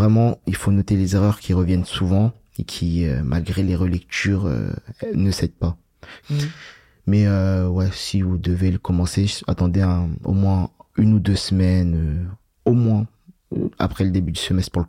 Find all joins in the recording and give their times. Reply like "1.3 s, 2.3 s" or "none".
6.2 s

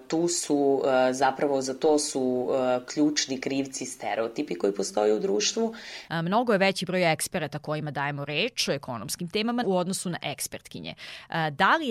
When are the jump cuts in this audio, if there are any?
6.1 s, 9.6 s

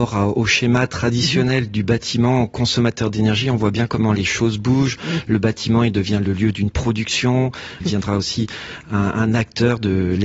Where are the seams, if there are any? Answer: 7.8 s

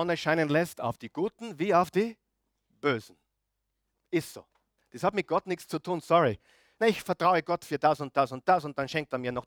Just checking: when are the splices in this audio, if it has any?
4.8 s, 6.8 s

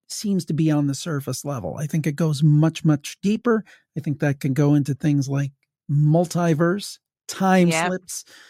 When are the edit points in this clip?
none

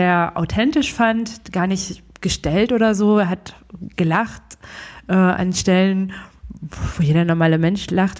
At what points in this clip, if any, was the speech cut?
none

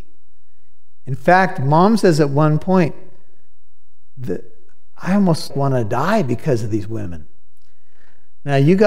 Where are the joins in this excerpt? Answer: 5.5 s

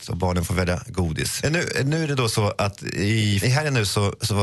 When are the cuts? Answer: 1.4 s, 3.4 s

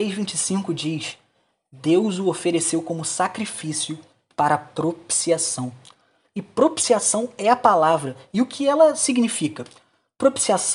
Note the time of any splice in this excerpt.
none

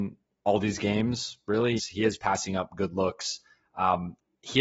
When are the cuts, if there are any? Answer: 1.8 s

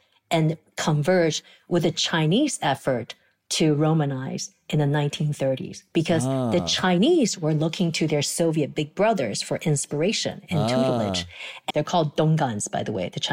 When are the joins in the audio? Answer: 11.7 s

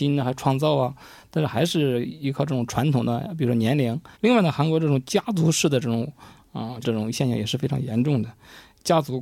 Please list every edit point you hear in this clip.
4.1 s, 6.8 s

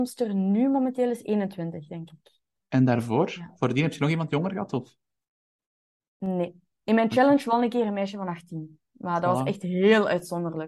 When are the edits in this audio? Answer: none

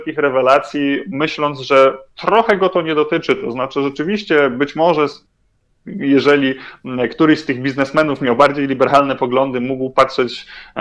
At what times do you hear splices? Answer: none

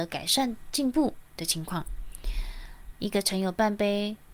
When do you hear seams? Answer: 2.9 s

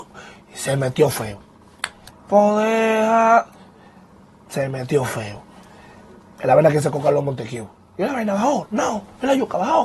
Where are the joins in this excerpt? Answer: 2.1 s

